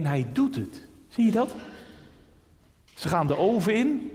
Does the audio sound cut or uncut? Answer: uncut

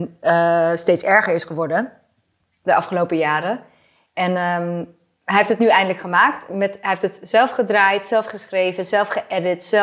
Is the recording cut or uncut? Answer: uncut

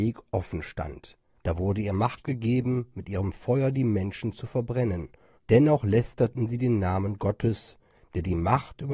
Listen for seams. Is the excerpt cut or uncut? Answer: cut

